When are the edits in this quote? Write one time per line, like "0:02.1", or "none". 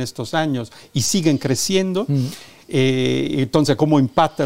none